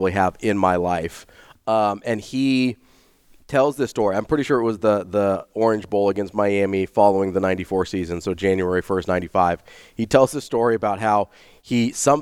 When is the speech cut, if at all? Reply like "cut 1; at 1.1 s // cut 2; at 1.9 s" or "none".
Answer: none